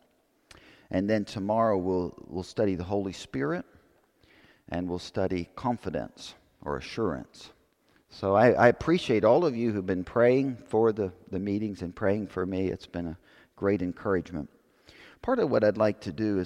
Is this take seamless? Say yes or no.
yes